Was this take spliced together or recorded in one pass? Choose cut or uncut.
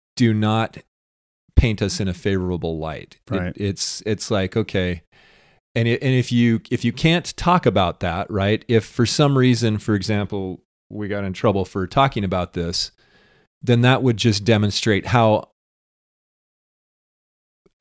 uncut